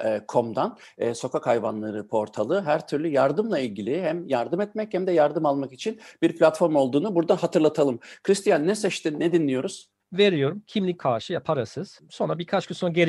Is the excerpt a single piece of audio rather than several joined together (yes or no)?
no